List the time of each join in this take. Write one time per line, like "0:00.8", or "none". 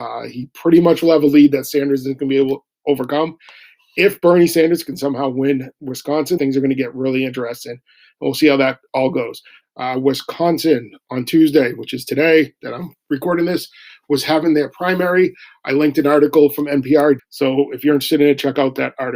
0:06.4
0:09.6
0:17.2

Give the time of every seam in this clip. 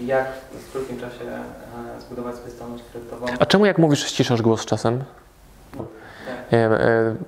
0:05.8

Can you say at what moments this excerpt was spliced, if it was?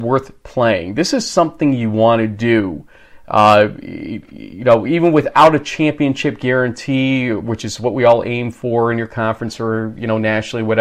none

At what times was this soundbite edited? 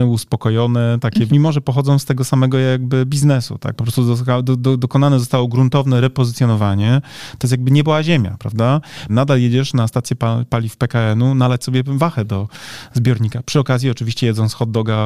0:01.3
0:09.1

